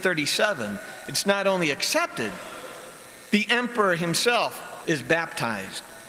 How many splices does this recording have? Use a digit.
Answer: 1